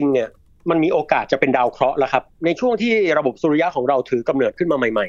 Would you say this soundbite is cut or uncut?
uncut